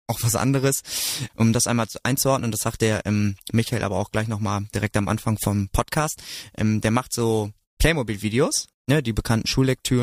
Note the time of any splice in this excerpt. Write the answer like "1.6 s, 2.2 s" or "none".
1.3 s, 8.7 s